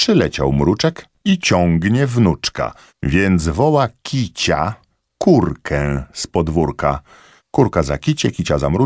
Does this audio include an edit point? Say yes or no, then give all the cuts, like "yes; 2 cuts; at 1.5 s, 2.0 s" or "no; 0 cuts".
yes; 2 cuts; at 2.9 s, 7.4 s